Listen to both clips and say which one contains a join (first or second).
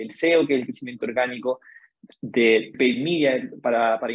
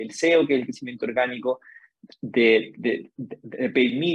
first